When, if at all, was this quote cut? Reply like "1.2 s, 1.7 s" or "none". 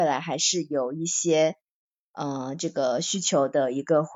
none

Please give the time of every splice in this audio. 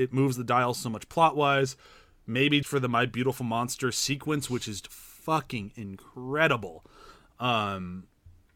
2.6 s, 4.8 s

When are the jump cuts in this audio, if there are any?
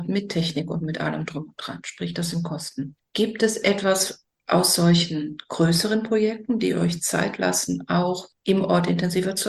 none

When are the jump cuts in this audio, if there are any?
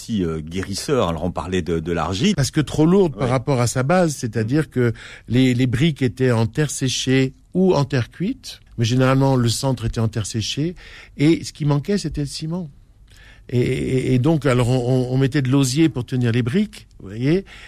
2.3 s, 8.7 s

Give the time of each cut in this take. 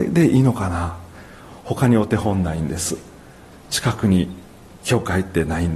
none

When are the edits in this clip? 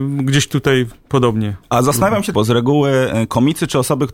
2.3 s

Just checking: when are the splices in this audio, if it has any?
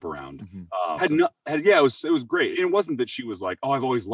1.0 s, 2.5 s

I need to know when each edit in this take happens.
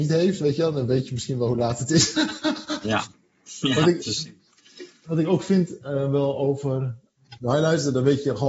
7.4 s

